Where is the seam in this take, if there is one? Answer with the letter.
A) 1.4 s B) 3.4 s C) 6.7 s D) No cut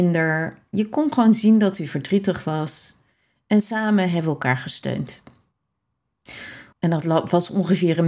C